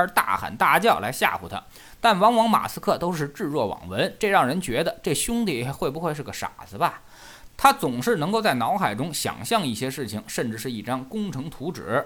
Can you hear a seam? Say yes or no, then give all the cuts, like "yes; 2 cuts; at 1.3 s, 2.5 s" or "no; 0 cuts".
yes; 1 cut; at 7.5 s